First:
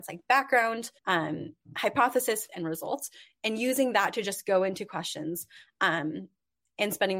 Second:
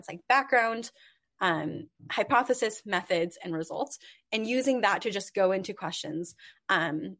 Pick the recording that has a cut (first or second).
first